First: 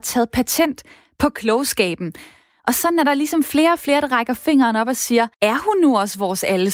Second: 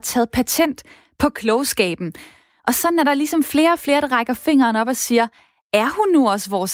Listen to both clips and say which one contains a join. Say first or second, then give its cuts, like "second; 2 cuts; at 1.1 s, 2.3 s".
first; 1 cut; at 5.3 s